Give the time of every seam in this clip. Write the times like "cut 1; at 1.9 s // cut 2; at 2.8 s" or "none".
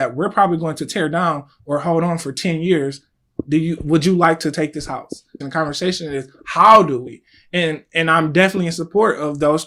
cut 1; at 5.4 s